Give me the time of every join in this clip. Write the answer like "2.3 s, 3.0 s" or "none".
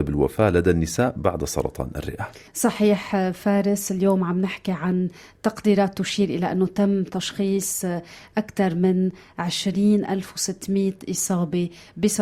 2.5 s